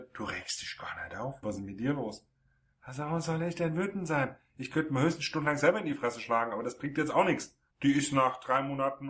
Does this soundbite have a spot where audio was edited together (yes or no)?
yes